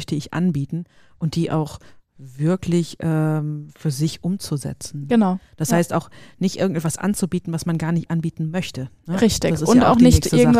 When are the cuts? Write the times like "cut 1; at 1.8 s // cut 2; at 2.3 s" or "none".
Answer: none